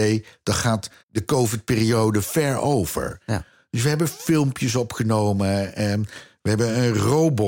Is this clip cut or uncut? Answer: cut